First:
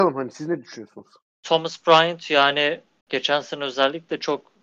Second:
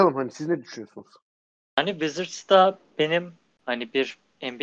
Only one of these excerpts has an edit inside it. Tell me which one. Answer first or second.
first